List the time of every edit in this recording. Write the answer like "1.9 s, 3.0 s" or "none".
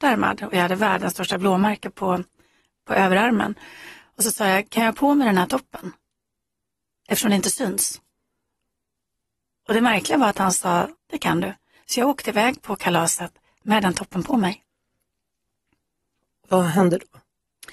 11.0 s